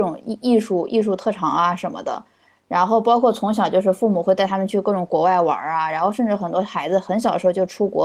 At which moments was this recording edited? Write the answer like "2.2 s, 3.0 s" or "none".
none